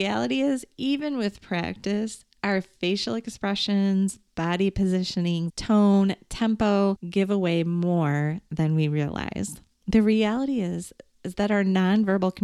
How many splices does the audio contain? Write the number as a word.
one